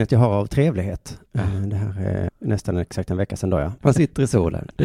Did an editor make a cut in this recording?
yes; 3 cuts; at 1.3 s, 2.3 s, 3.8 s

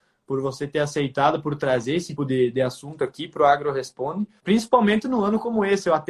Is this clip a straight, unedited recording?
no; 2 cuts; at 2.2 s, 4.4 s

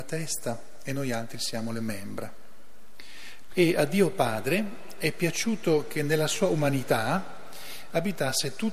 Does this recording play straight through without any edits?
no; 1 cut; at 3.5 s

